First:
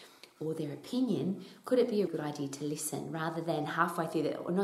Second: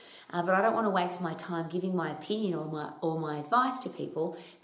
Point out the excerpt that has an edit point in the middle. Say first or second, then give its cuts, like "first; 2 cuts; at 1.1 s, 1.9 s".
first; 1 cut; at 2.1 s